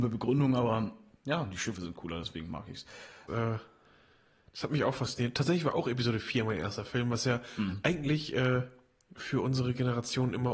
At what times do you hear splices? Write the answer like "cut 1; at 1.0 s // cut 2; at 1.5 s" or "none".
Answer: cut 1; at 3.3 s